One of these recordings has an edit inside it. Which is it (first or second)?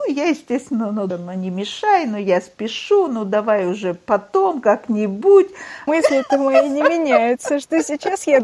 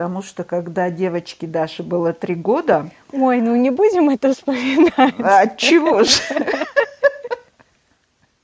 first